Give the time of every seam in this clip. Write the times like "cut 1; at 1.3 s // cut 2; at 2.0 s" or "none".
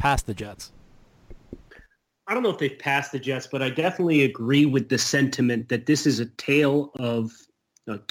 none

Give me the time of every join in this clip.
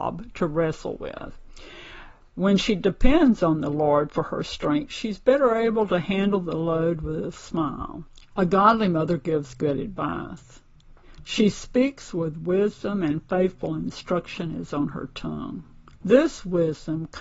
cut 1; at 8.3 s // cut 2; at 16.0 s

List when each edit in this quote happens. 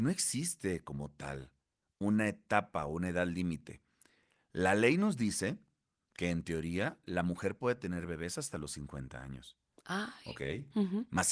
none

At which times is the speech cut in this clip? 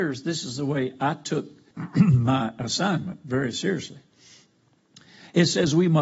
cut 1; at 1.7 s

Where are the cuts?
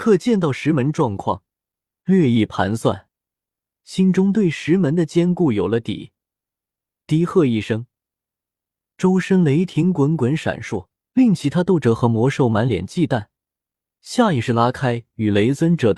cut 1; at 11.1 s

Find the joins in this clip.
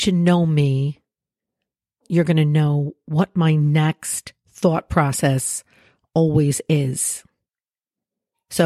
none

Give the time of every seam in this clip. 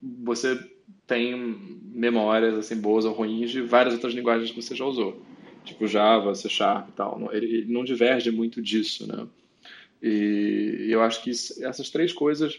none

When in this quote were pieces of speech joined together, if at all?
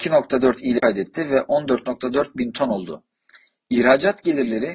none

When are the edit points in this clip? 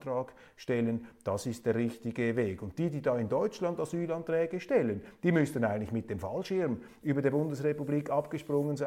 none

